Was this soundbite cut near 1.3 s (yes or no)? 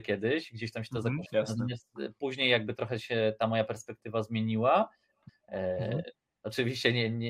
yes